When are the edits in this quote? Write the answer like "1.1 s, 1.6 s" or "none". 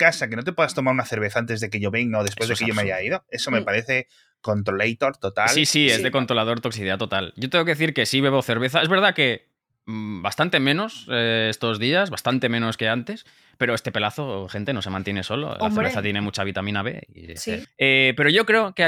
17.6 s

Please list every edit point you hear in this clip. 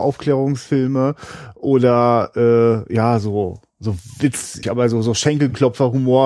4.6 s

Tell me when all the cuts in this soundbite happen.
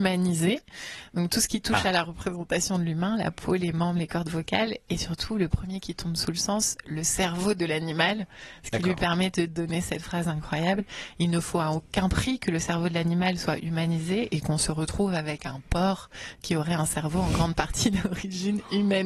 none

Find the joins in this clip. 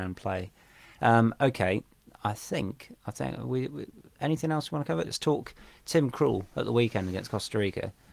5.1 s

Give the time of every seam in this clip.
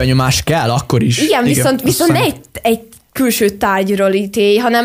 none

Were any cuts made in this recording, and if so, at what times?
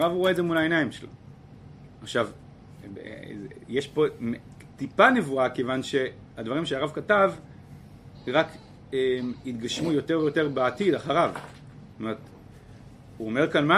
none

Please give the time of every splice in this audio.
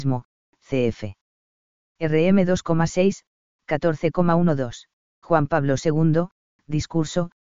5.2 s

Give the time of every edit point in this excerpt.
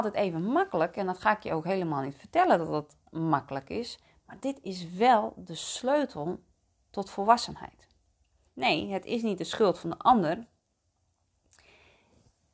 8.5 s

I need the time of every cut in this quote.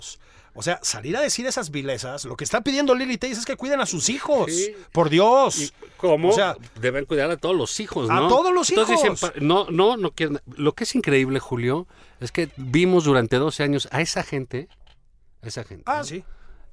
none

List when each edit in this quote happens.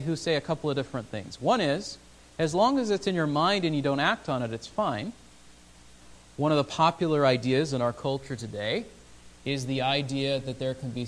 6.2 s

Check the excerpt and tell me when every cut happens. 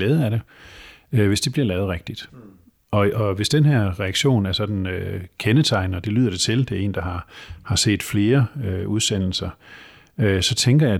none

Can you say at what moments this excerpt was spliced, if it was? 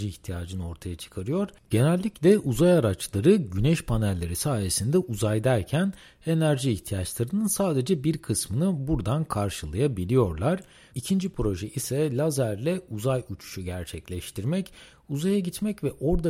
10.9 s

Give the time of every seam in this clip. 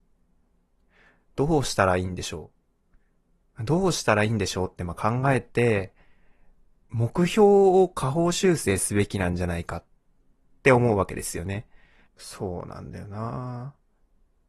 12.1 s

